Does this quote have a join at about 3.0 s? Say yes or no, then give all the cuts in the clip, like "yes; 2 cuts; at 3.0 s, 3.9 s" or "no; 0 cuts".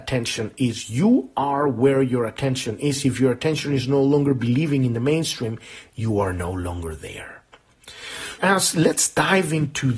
no; 1 cut; at 8.4 s